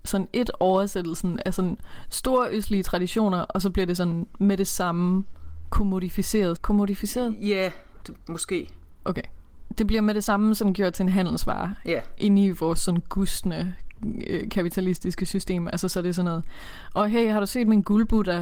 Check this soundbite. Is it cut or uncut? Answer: cut